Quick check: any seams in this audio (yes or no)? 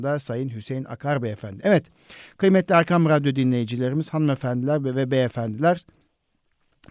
no